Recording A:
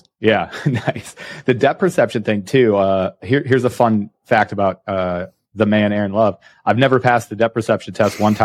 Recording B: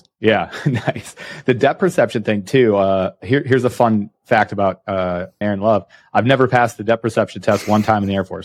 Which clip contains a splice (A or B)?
B